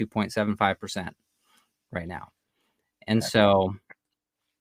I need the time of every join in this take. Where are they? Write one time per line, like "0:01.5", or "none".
none